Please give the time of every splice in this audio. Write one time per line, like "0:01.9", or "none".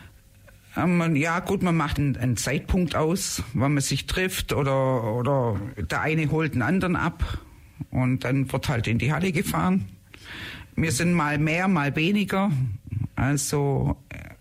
0:02.0